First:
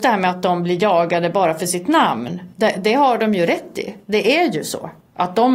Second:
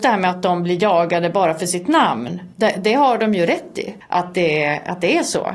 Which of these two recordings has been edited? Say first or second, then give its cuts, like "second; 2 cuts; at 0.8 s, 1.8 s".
second; 1 cut; at 4.0 s